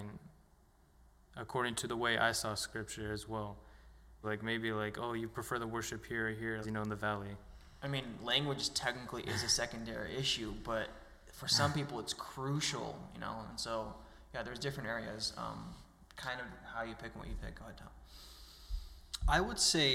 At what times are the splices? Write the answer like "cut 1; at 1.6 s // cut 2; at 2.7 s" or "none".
cut 1; at 4.2 s // cut 2; at 6.6 s